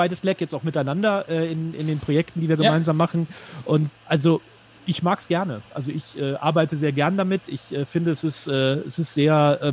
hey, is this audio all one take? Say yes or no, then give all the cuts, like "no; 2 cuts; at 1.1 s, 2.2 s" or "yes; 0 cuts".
no; 1 cut; at 3.9 s